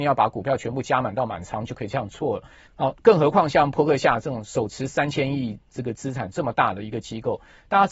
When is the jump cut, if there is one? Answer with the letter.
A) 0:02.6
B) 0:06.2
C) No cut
A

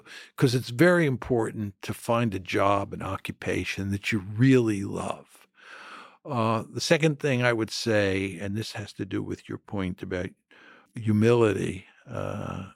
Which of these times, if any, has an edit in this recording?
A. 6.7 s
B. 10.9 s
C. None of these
B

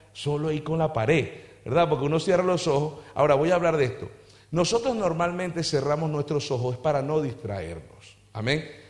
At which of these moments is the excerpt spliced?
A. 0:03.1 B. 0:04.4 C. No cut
C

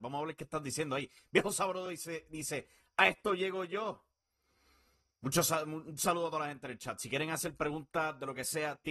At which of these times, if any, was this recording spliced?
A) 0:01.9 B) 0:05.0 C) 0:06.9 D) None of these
D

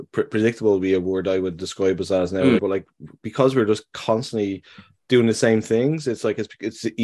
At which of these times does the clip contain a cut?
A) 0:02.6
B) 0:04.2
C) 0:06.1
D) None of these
A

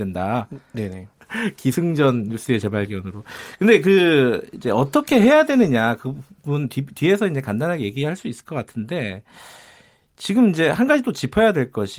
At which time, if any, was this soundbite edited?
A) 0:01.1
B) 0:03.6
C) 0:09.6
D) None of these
A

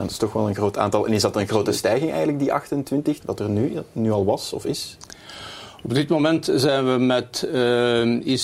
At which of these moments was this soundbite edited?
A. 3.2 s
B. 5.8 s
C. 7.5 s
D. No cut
A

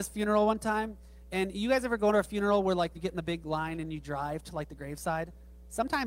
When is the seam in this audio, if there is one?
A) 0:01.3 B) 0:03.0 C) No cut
B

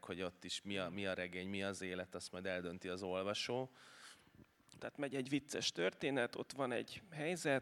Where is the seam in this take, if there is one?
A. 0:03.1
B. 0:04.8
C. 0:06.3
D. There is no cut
B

